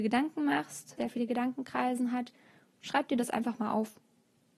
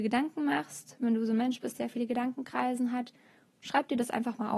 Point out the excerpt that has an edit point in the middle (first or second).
first